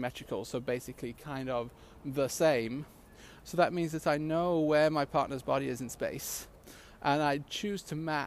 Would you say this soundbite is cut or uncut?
cut